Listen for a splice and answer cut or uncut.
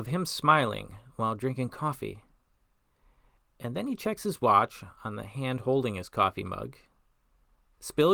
uncut